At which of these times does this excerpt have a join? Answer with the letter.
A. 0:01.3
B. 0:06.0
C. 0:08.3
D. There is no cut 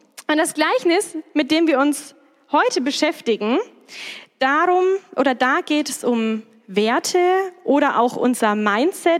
D